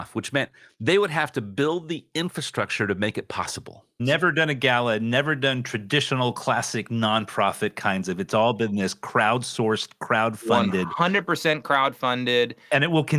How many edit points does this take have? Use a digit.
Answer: 1